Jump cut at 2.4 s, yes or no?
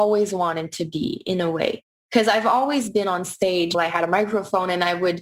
no